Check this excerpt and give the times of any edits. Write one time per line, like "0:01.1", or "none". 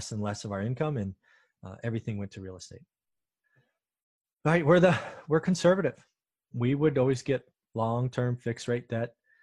none